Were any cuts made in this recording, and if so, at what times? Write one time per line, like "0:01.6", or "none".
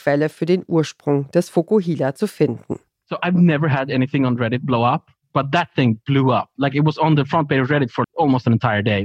0:08.0